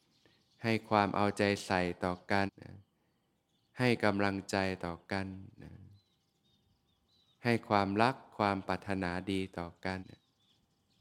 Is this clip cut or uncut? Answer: cut